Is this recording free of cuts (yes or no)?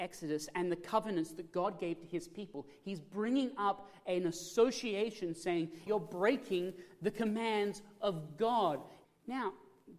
no